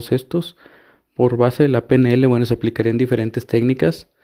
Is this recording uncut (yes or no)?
yes